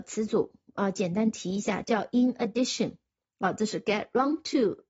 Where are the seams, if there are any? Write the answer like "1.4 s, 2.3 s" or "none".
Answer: 3.2 s

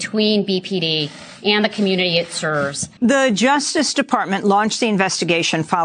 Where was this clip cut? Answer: 3.0 s

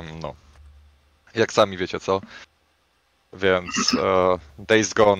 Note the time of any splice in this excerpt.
none

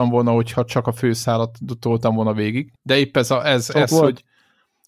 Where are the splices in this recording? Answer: 2.8 s

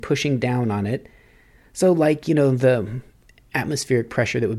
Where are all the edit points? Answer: none

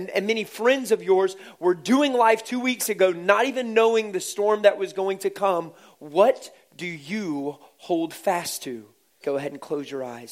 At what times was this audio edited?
9.2 s

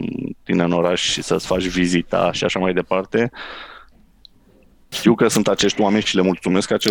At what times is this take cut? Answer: 4.9 s

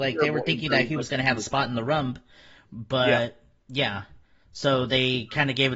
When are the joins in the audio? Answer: none

